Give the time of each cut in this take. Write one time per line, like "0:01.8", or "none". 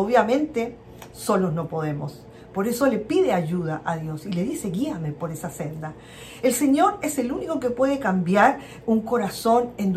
none